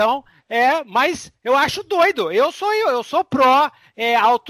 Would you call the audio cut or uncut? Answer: uncut